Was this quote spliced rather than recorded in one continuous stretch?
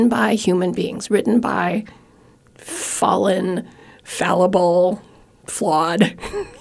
no; 0 cuts

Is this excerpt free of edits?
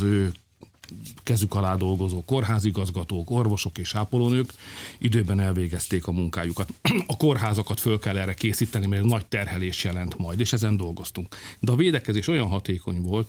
no; 1 cut; at 6.7 s

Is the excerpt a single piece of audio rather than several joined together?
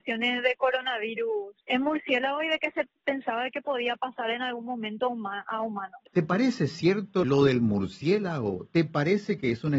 no; 1 cut; at 6.1 s

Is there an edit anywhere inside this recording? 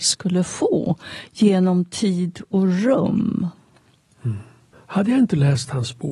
yes; 1 cut; at 4.7 s

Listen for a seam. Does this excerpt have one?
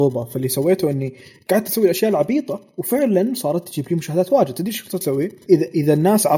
yes; 1 cut; at 5.5 s

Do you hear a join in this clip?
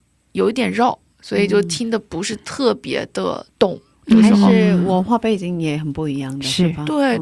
no; 0 cuts

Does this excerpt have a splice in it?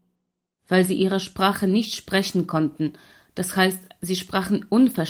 no; 0 cuts

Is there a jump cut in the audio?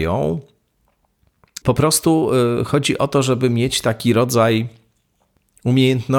yes; 1 cut; at 1.6 s

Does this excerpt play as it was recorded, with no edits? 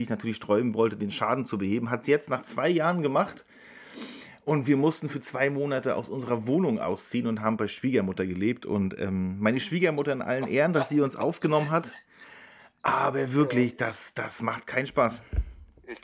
yes; 0 cuts

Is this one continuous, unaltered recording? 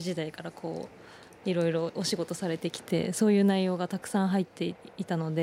yes; 0 cuts

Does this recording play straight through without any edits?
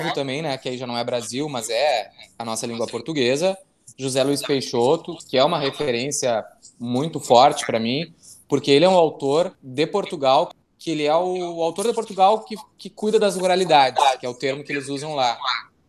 yes; 0 cuts

